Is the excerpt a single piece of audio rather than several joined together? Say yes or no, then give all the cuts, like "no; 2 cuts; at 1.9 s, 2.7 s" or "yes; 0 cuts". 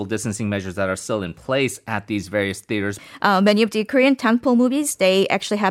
no; 1 cut; at 3.0 s